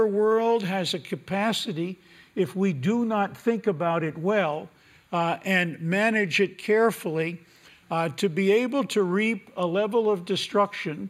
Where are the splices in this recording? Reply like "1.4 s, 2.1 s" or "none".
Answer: none

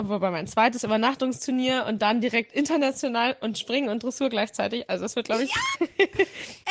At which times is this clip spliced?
5.7 s

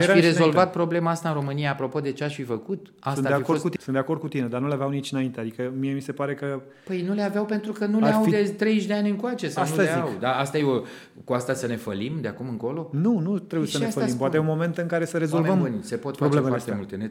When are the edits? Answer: 3.8 s

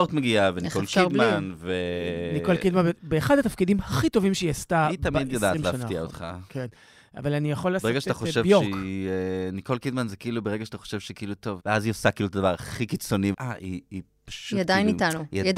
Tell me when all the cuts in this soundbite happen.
11.6 s, 13.3 s

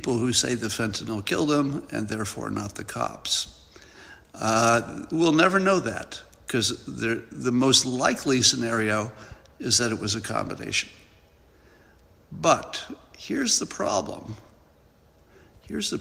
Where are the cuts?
none

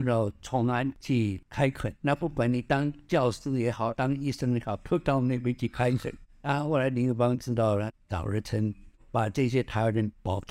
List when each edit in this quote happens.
none

